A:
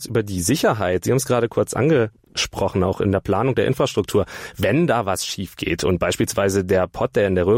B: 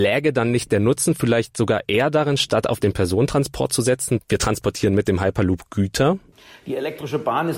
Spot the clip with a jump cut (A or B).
B